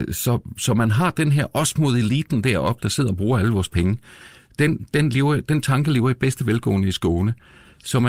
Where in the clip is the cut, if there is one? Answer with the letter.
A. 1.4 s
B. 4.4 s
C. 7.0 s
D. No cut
D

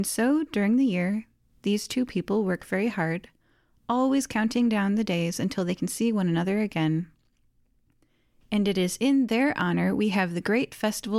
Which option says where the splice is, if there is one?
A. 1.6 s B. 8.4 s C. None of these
C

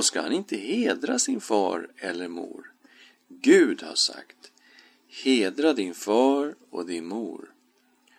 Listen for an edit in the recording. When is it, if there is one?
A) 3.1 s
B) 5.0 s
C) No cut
A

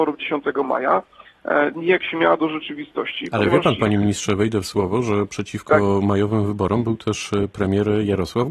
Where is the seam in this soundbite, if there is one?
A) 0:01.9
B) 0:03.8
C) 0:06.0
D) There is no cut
D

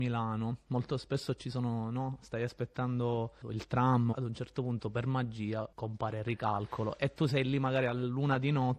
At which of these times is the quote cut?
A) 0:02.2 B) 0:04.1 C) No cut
B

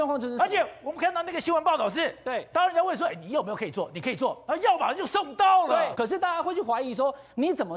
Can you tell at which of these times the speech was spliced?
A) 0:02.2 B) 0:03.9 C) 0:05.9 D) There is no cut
C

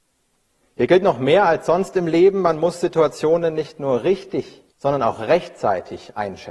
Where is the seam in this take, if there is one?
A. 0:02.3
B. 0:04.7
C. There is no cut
B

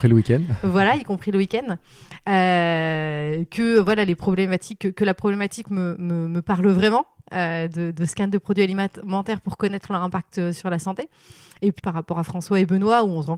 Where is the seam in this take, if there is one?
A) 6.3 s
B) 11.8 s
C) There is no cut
B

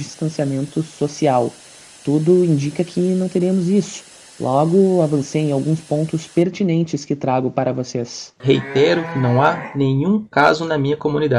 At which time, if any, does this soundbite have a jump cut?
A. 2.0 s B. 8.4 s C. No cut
B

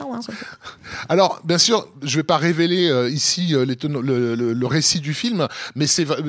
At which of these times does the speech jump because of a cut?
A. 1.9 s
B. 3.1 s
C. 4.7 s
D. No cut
D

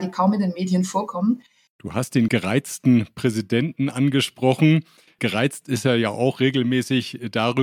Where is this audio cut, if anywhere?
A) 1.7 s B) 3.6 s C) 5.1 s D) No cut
A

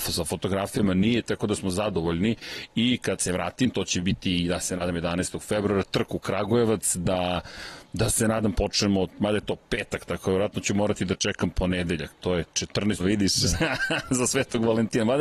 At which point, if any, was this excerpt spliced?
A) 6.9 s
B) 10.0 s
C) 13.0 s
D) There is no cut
C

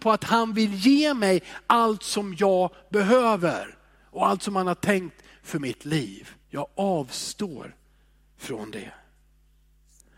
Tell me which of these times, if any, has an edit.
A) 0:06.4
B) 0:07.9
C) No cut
A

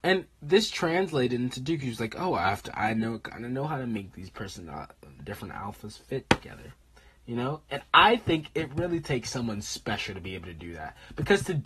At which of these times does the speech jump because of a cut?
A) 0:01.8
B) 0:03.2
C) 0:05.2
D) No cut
C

